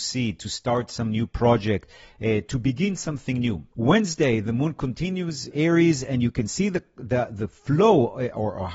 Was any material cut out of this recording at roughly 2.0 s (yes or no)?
no